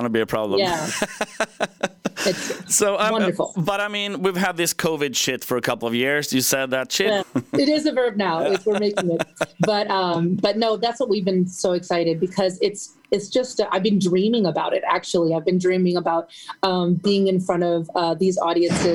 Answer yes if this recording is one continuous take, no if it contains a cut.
no